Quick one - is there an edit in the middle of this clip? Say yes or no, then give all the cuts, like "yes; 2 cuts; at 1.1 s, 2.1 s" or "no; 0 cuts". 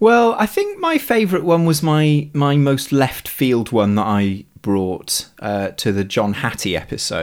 no; 0 cuts